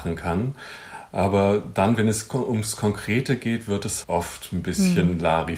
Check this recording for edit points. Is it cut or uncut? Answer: cut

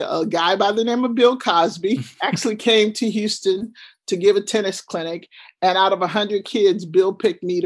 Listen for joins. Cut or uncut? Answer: uncut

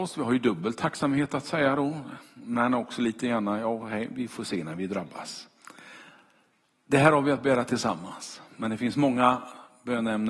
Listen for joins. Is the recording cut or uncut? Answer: uncut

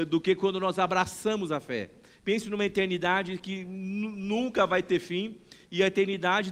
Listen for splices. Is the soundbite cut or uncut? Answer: cut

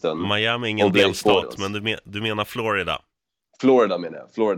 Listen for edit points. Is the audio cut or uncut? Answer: uncut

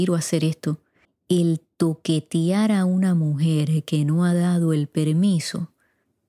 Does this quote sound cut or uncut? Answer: cut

